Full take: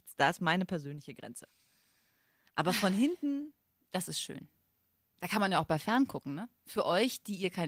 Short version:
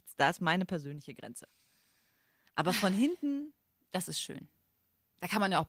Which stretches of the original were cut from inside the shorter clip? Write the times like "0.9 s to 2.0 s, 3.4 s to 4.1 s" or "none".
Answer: none